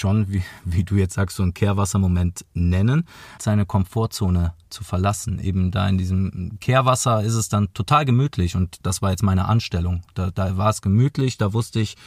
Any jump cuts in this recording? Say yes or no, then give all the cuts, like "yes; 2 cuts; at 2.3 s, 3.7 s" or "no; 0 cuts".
yes; 1 cut; at 3.4 s